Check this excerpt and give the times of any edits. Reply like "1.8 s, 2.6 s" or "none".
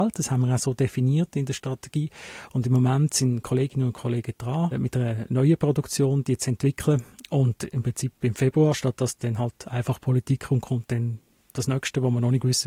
none